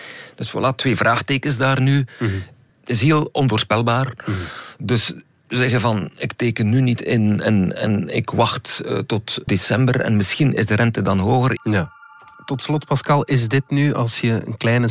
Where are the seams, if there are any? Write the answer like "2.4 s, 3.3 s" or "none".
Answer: 2.7 s, 9.5 s, 11.6 s